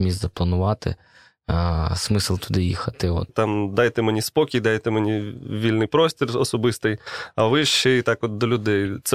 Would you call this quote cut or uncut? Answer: cut